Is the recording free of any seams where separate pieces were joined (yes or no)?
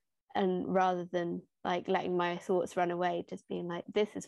yes